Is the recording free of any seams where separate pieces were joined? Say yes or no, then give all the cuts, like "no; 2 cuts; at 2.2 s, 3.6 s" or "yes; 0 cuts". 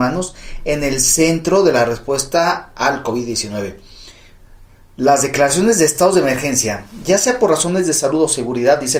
yes; 0 cuts